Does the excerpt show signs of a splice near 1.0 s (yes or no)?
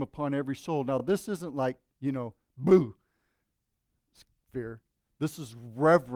no